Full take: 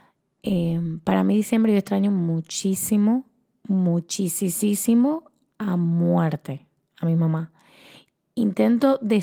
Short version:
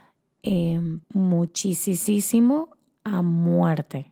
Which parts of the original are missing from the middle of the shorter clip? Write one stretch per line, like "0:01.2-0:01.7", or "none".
0:01.0-0:03.6